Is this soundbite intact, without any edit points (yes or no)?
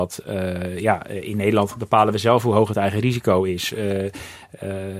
yes